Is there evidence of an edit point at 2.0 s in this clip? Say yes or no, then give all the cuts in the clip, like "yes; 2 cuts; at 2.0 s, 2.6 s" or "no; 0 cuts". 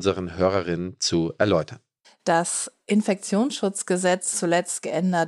yes; 2 cuts; at 2.0 s, 4.3 s